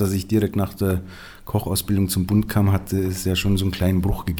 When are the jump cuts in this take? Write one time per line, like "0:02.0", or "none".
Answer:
none